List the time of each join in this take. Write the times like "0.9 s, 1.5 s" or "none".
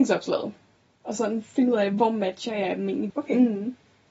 3.1 s